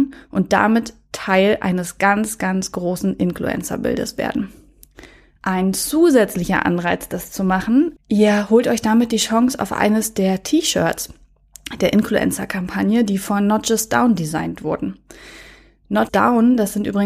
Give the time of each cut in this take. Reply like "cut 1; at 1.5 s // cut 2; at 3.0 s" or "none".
cut 1; at 8.0 s // cut 2; at 16.1 s